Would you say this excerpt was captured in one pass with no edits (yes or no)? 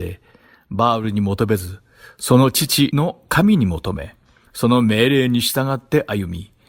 yes